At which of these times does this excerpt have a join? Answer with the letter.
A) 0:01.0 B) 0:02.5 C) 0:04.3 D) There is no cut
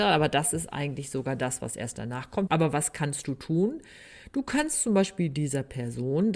B